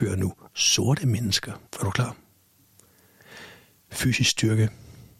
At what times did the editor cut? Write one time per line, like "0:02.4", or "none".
0:01.7